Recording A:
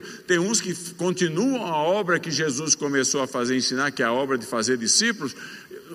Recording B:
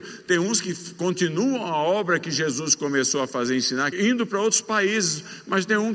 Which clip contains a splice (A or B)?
B